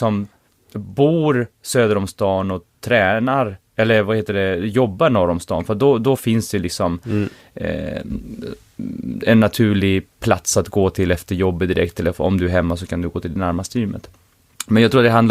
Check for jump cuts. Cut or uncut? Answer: uncut